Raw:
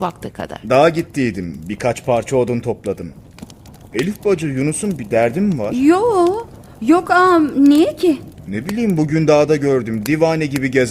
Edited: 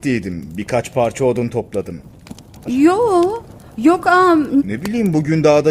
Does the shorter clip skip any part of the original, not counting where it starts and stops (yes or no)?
yes